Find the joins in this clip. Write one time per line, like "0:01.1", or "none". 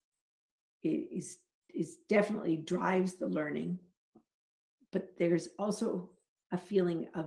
none